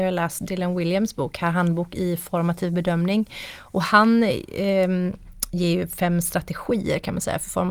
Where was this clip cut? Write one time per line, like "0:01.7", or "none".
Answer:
none